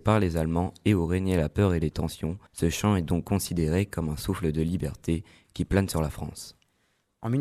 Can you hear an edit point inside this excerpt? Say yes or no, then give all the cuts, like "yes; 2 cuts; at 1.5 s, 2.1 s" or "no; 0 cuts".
yes; 1 cut; at 2.5 s